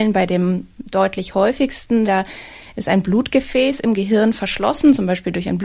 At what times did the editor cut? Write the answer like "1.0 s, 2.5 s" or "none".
2.1 s